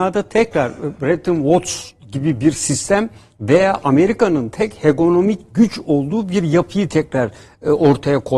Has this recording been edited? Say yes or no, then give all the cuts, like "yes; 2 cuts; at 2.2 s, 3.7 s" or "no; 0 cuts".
no; 0 cuts